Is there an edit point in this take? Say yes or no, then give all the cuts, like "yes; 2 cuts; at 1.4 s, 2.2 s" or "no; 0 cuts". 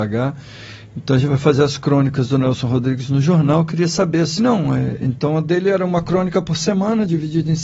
yes; 1 cut; at 4.4 s